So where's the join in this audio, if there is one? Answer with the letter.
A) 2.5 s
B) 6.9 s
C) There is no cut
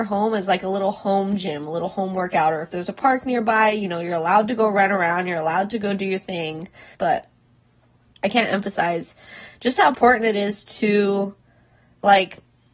B